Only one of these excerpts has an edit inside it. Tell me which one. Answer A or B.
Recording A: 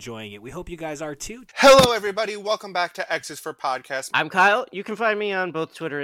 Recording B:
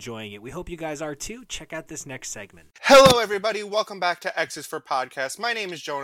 A